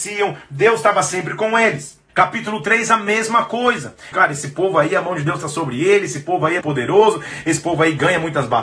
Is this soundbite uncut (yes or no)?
no